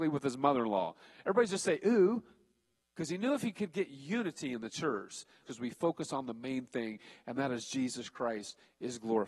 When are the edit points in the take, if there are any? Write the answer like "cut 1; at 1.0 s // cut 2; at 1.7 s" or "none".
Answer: cut 1; at 2.8 s // cut 2; at 5.4 s